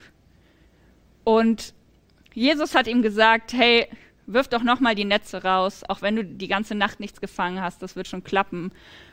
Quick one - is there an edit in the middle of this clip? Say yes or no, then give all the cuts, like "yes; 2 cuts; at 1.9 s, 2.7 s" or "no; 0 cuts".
no; 0 cuts